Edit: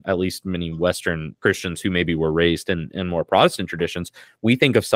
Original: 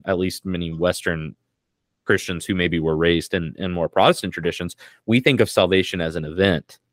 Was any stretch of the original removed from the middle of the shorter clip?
yes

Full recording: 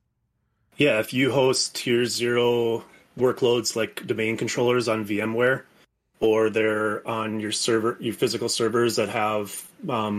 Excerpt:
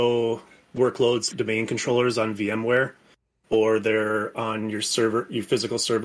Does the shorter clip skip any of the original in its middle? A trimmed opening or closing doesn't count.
yes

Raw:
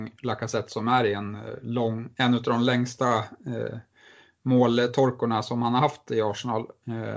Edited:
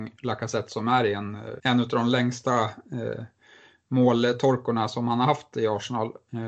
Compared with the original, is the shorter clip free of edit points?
no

